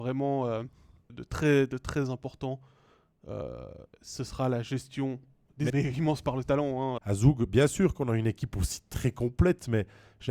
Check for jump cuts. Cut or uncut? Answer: cut